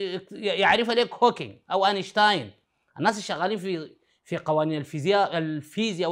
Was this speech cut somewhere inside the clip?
no; 0 cuts

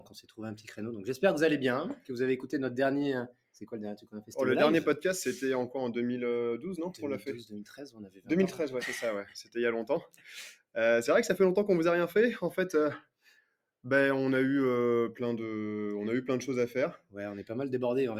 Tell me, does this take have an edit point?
no; 0 cuts

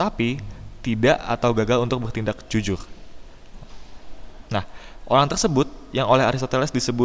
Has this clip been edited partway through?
yes; 1 cut; at 4.5 s

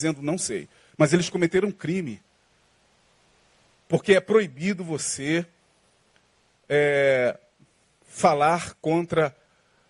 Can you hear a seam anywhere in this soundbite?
no; 0 cuts

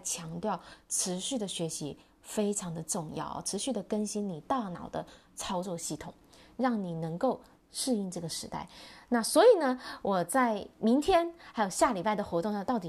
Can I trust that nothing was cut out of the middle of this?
yes; 0 cuts

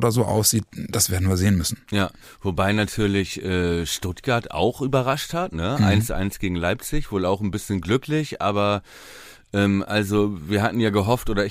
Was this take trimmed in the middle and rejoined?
yes; 1 cut; at 1.8 s

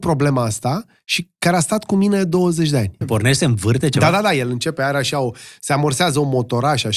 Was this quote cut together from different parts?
yes; 1 cut; at 3.0 s

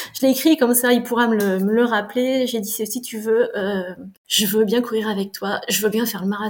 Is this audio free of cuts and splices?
yes; 0 cuts

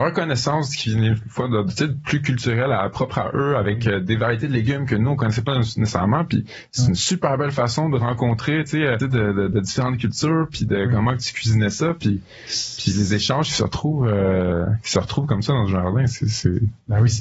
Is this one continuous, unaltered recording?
no; 1 cut; at 9.0 s

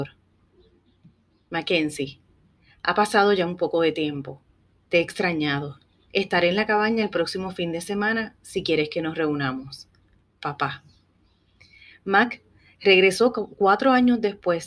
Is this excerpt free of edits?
no; 1 cut; at 1.5 s

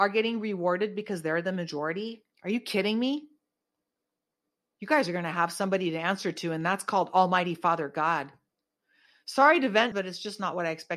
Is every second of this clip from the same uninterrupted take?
no; 2 cuts; at 2.3 s, 9.9 s

